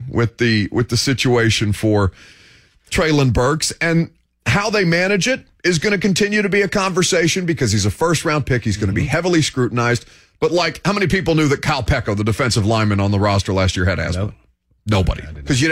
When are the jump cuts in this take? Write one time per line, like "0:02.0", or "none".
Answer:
none